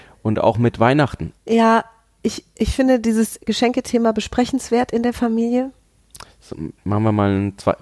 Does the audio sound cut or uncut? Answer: cut